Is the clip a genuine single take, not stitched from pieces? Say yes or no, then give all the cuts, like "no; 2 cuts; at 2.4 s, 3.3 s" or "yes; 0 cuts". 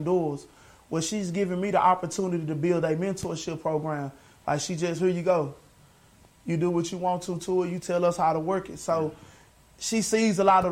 yes; 0 cuts